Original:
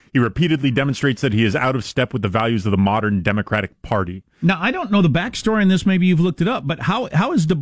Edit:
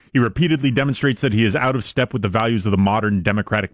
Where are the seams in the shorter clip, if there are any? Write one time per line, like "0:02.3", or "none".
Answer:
none